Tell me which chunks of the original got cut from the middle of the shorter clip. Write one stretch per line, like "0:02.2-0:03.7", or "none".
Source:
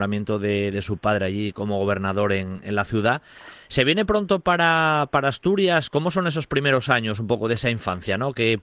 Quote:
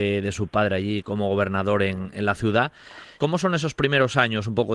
0:03.7-0:05.9